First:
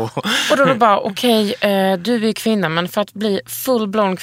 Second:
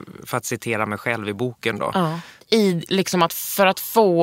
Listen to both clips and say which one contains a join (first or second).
second